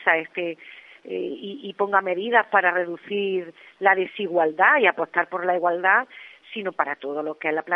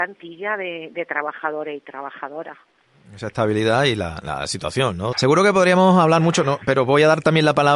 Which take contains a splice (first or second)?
second